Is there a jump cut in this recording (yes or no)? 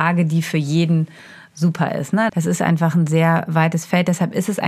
yes